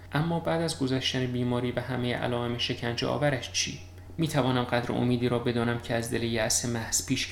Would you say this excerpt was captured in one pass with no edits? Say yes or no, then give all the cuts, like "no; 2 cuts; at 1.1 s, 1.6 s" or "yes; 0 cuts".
yes; 0 cuts